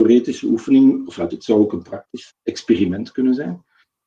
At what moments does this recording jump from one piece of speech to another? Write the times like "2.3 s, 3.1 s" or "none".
1.3 s, 2.3 s